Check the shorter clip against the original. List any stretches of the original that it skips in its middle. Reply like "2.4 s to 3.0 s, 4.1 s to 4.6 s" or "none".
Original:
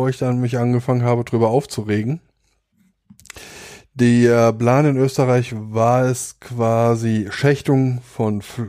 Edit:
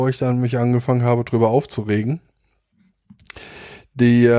none